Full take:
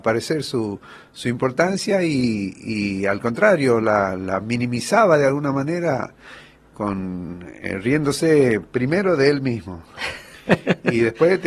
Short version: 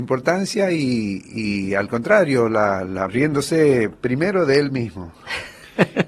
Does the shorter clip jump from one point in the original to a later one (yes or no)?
yes